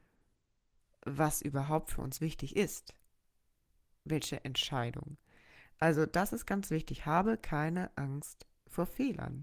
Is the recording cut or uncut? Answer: uncut